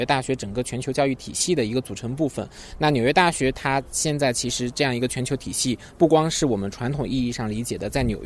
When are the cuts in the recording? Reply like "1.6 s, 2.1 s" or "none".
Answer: none